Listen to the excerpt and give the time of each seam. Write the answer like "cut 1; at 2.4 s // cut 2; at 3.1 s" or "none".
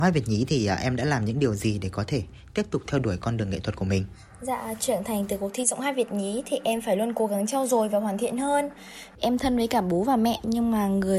cut 1; at 9.1 s